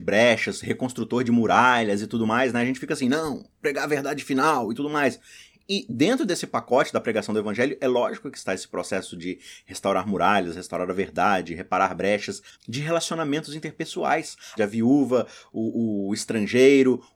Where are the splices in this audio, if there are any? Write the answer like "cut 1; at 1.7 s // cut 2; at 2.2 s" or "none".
cut 1; at 12.5 s // cut 2; at 14.6 s